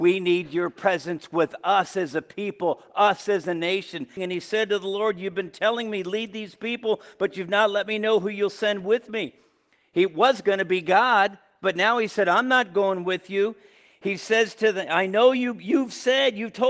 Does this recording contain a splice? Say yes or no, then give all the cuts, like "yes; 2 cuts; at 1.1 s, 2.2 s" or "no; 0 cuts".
yes; 1 cut; at 4.2 s